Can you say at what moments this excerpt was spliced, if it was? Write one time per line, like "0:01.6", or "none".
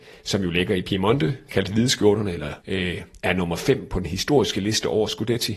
0:02.6